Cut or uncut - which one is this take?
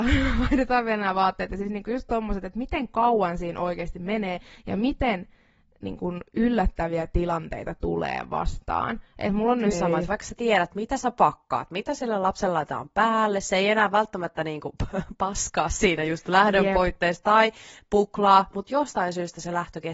cut